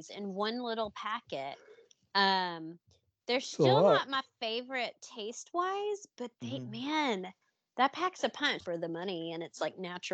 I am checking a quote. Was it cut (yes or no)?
yes